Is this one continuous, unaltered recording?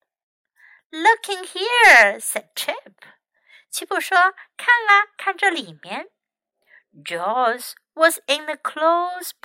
yes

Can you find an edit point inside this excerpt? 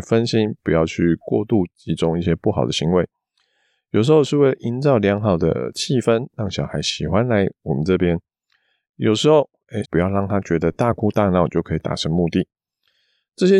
yes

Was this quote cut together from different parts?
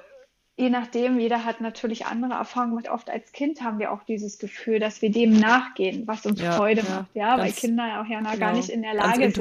yes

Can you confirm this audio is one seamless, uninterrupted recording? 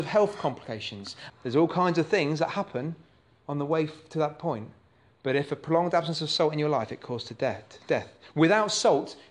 no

